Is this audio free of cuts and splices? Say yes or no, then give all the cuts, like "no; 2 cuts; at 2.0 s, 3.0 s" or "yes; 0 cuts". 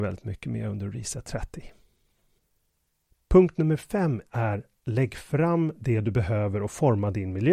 yes; 0 cuts